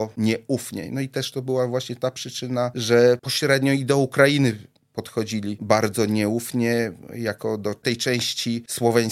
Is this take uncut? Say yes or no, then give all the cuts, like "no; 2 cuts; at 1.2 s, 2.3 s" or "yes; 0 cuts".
yes; 0 cuts